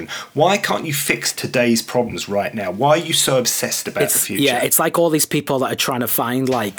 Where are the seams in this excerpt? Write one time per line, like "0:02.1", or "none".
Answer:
none

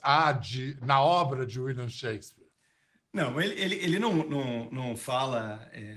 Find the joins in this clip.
none

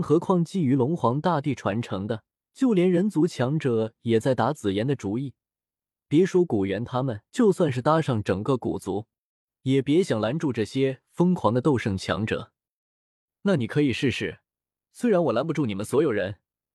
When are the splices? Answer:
0:02.4
0:07.3

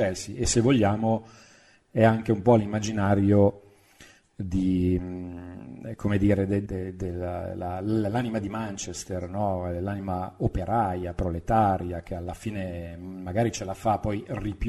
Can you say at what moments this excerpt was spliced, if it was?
0:06.7

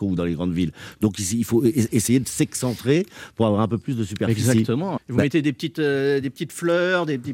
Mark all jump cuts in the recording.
0:05.0

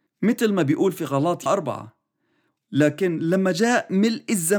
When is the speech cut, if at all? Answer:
0:01.5

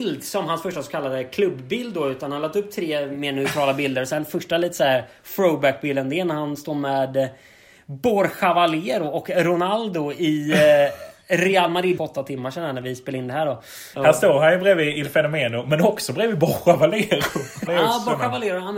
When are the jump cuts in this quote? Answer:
0:12.0
0:13.9
0:17.7

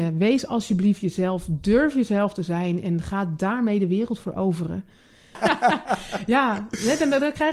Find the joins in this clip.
0:05.3

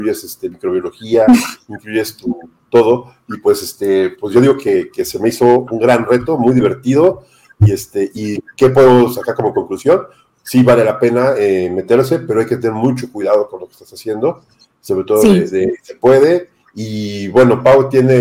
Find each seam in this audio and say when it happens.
none

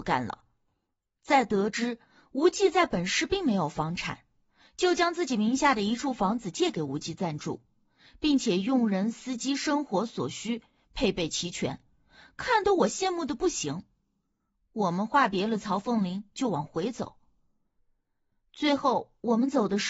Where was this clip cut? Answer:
0:17.8

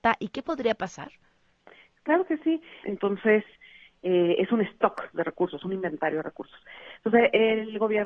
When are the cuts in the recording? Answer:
0:02.8
0:05.1

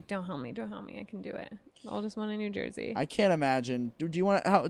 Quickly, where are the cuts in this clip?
0:01.7

